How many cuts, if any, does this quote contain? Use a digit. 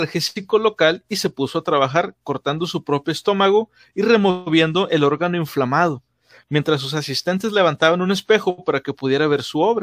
0